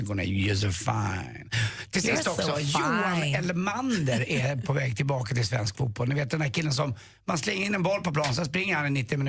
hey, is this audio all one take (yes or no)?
yes